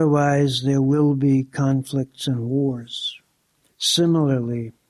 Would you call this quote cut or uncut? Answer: cut